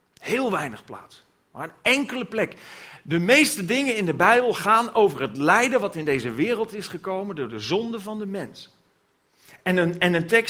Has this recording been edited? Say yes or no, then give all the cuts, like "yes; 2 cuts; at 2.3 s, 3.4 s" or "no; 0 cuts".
no; 0 cuts